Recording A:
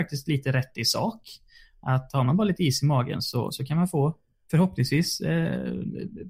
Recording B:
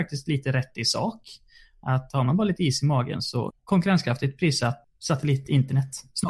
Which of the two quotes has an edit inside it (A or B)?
B